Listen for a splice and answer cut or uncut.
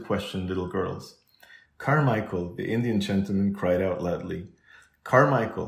cut